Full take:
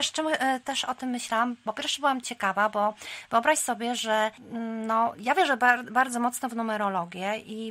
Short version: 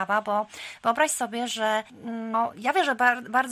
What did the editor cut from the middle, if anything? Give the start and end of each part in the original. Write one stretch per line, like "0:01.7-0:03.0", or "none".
0:04.8-0:05.0